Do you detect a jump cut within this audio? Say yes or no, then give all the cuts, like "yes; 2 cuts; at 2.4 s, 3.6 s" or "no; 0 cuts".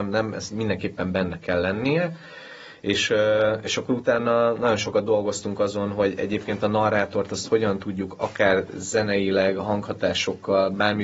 no; 0 cuts